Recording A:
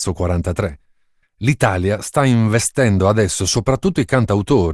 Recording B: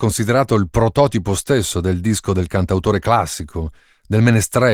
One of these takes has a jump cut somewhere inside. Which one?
A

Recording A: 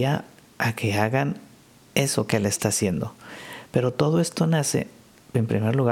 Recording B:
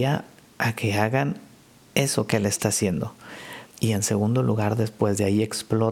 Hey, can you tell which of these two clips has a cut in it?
B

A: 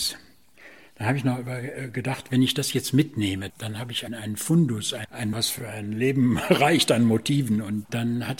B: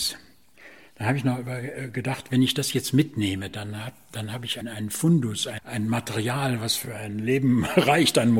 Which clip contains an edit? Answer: A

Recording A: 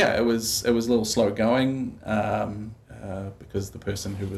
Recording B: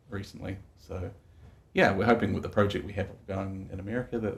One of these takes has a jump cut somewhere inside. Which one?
A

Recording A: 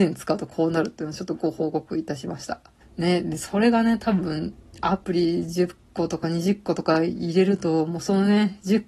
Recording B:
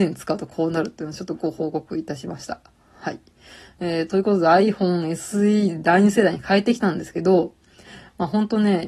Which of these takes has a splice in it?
A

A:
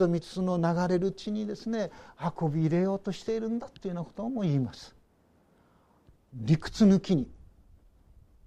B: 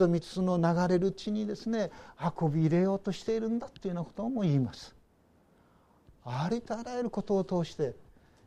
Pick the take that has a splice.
A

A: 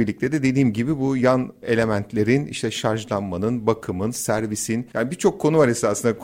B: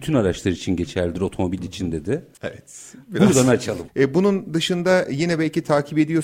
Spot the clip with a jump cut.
B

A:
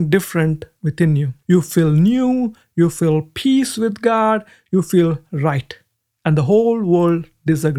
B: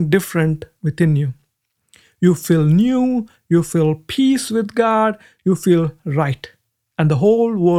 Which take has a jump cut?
A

